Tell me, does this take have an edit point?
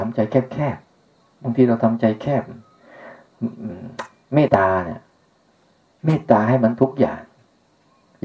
yes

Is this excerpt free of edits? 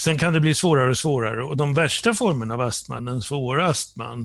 yes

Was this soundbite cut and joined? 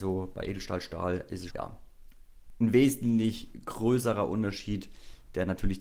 yes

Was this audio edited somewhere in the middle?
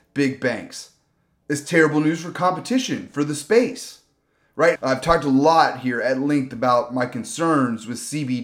yes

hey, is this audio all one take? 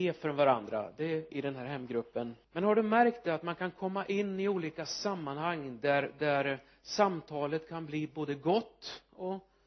no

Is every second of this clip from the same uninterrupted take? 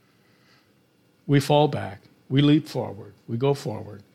no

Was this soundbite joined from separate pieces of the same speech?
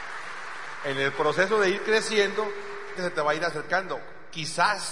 yes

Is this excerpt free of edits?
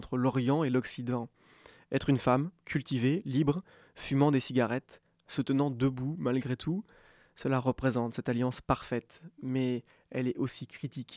yes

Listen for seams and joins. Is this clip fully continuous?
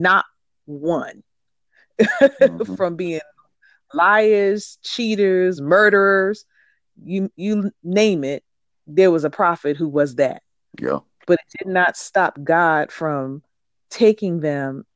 no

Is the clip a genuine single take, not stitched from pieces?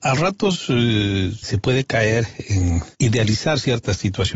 no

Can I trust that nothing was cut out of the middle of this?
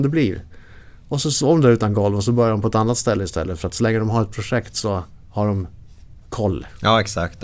no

